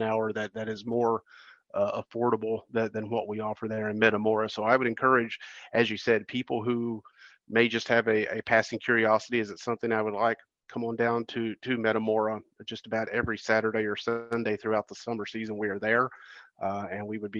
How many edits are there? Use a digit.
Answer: 0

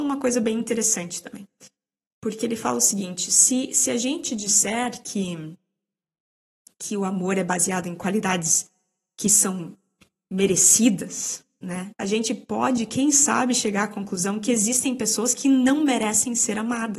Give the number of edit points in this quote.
1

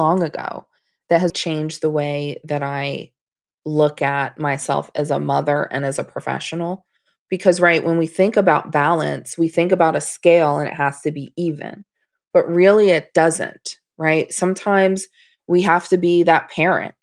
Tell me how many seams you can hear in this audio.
1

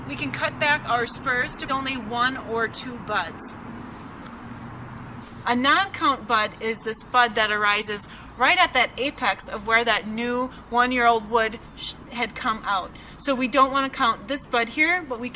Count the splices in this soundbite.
2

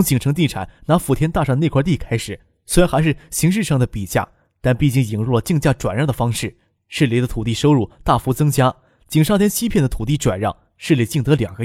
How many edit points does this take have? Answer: 0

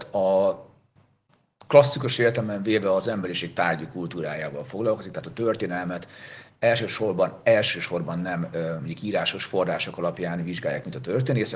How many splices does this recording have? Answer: 0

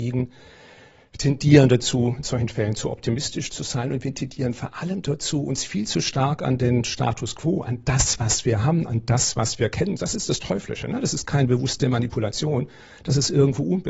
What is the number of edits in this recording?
1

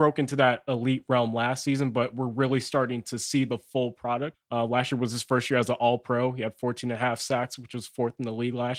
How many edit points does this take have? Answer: 1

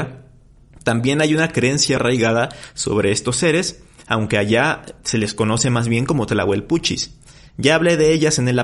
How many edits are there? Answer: 1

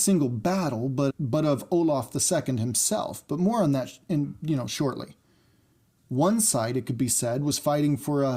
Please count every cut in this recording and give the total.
2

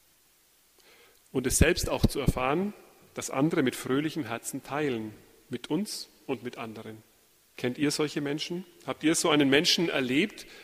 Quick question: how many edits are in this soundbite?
0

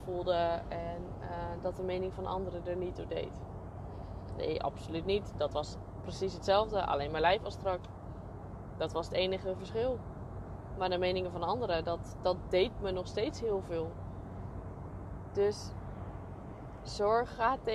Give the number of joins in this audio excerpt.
0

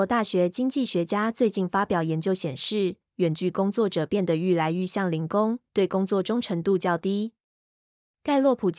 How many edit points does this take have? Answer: 2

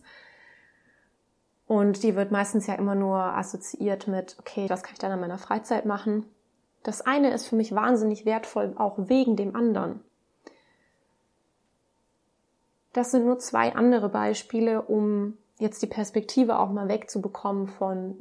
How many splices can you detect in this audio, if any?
2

